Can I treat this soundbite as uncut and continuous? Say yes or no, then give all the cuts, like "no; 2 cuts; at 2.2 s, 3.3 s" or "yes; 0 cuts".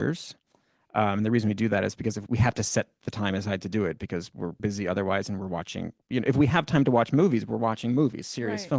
no; 2 cuts; at 2.3 s, 4.6 s